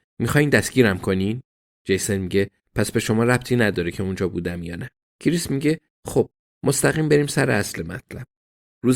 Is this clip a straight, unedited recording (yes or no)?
no